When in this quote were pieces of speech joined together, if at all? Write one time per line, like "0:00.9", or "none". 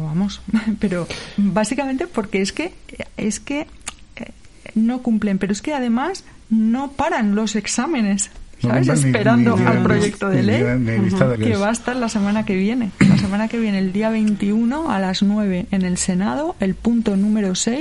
0:11.4

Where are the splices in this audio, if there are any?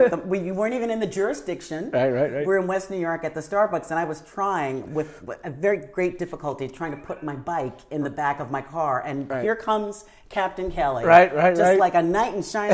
none

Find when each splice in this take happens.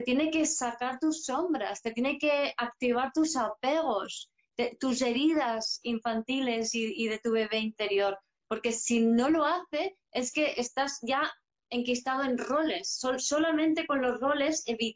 none

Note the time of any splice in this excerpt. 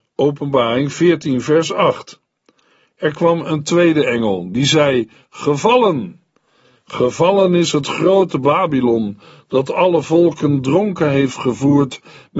none

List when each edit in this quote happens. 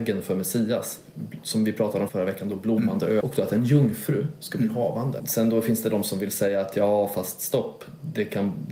0:02.1
0:03.2
0:05.2

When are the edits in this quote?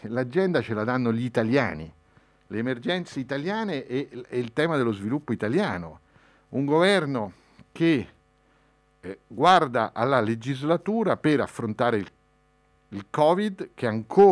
none

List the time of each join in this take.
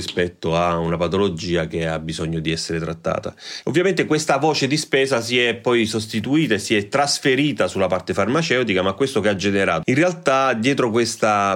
0:03.6
0:09.8

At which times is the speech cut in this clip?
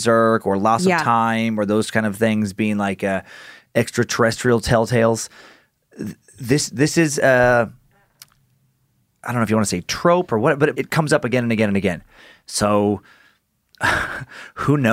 0:10.7

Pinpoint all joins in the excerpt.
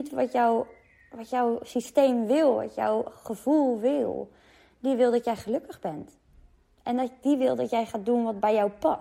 none

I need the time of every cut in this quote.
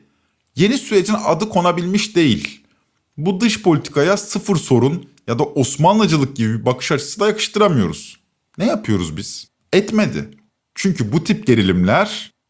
0:09.6

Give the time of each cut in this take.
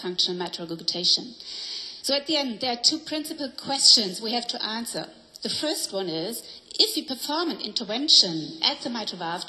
none

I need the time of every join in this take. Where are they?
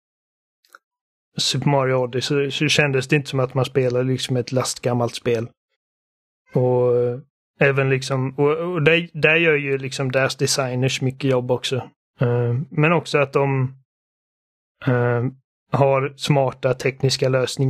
none

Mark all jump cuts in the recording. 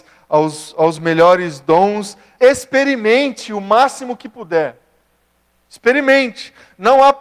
0:02.4

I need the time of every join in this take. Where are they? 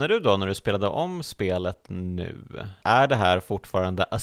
0:02.8

